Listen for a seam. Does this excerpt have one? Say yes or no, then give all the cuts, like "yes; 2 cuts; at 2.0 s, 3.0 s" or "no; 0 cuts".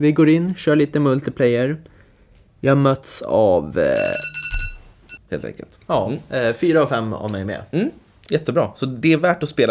yes; 1 cut; at 5.2 s